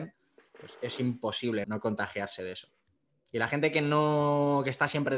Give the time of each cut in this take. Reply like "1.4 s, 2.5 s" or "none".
1.6 s